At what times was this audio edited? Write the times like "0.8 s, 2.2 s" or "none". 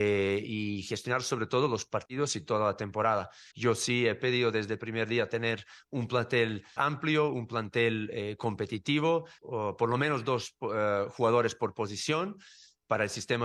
3.5 s, 6.8 s, 9.4 s